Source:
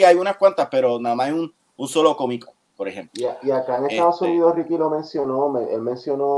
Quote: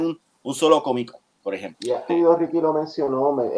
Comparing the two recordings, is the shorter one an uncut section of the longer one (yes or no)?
no